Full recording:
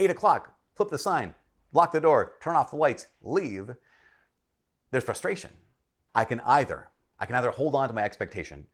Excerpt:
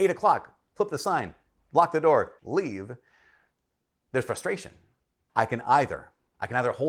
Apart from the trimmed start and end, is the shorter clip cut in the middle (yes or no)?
yes